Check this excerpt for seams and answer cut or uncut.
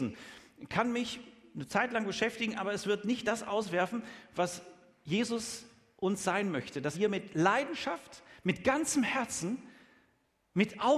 cut